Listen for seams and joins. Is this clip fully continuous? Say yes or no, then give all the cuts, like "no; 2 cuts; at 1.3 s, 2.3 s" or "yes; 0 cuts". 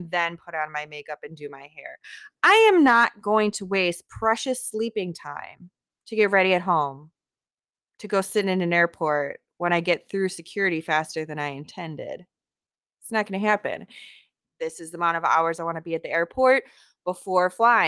no; 1 cut; at 14.4 s